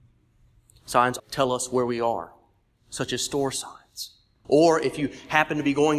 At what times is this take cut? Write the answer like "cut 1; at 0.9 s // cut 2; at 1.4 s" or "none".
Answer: cut 1; at 1.2 s // cut 2; at 4.4 s